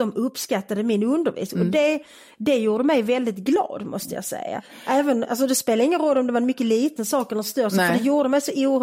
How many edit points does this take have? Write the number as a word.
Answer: zero